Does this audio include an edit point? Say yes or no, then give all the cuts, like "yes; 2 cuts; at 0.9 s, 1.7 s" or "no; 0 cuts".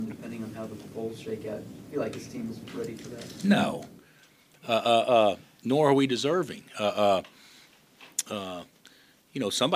no; 0 cuts